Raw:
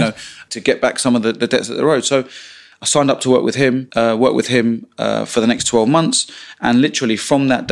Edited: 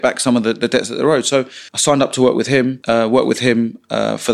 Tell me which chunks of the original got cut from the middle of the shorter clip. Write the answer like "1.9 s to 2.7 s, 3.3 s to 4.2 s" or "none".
2.5 s to 2.8 s